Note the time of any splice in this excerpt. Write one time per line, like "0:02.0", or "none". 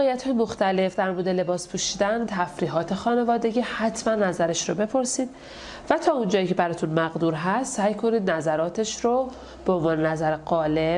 0:02.3